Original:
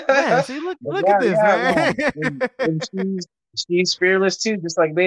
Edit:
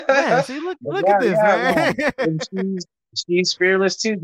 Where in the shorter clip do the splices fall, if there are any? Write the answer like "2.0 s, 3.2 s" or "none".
2.1 s